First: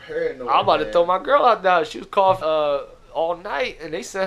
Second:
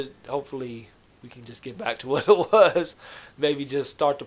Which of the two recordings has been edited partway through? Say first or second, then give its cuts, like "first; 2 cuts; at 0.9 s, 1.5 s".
first; 1 cut; at 2.4 s